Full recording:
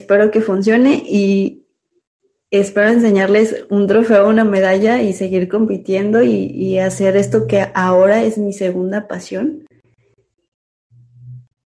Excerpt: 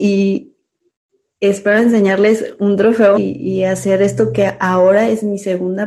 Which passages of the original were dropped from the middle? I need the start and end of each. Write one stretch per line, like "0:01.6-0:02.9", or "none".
0:04.3-0:06.3